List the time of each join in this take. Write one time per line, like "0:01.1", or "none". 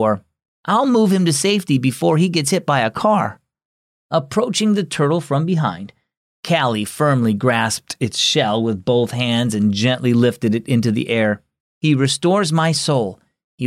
0:03.9
0:11.6